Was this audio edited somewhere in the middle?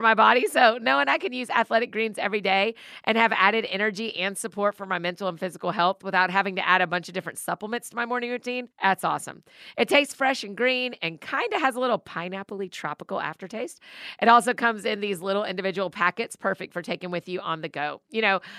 no; 0 cuts

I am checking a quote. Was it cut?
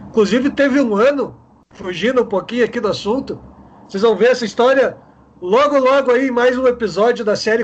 no; 0 cuts

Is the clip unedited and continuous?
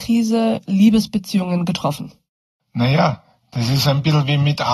yes; 0 cuts

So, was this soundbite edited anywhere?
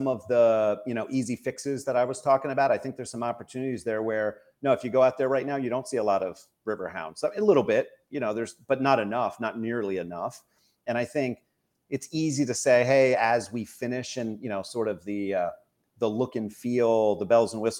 no; 0 cuts

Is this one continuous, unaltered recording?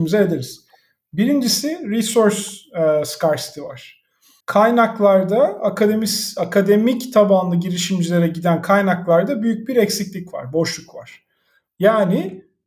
no; 2 cuts; at 4.4 s, 11.7 s

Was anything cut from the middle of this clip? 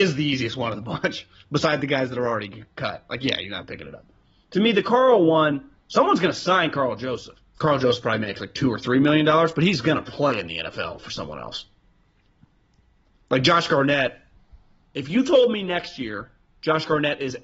yes; 1 cut; at 7.6 s

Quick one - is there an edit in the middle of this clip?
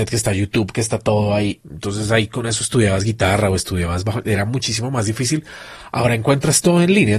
yes; 1 cut; at 1.6 s

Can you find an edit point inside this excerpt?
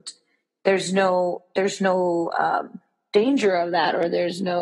no; 0 cuts

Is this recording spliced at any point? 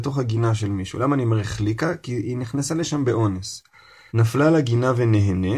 yes; 1 cut; at 4.1 s

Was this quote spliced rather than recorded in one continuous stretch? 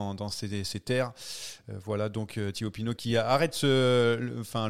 yes; 1 cut; at 3.0 s

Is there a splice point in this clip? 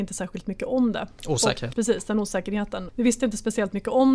yes; 2 cuts; at 1.7 s, 2.9 s

